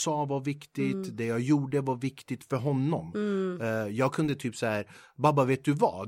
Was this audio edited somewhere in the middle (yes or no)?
no